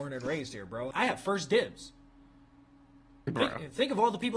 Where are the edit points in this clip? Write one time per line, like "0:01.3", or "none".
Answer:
0:00.9